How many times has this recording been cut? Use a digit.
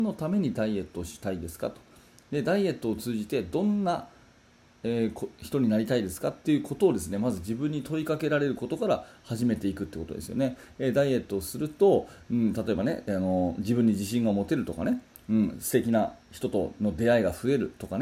0